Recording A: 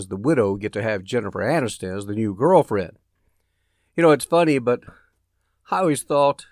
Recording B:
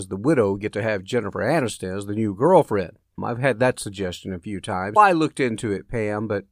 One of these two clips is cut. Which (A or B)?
B